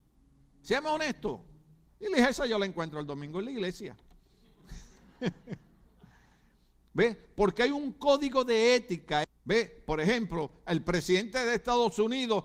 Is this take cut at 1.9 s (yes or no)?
yes